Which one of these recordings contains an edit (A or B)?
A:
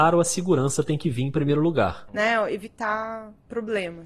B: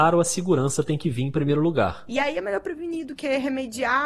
A